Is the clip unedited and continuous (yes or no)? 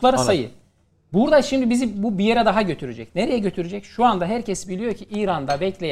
yes